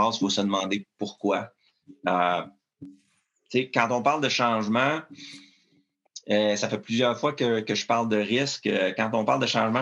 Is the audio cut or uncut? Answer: uncut